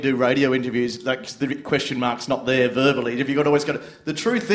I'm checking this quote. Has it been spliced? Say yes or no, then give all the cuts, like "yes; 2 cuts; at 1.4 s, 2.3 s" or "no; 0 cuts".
no; 0 cuts